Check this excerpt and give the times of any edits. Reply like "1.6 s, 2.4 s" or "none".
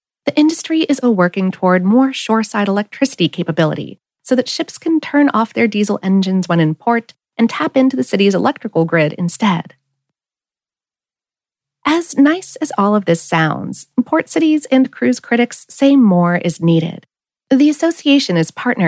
1.0 s